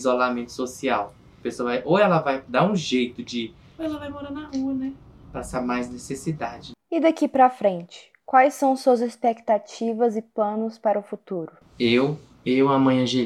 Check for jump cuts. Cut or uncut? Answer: cut